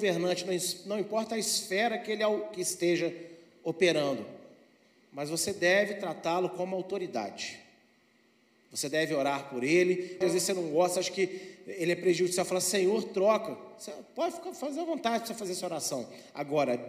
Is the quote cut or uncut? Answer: cut